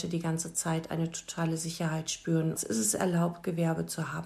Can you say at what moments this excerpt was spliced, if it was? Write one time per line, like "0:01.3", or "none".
0:02.6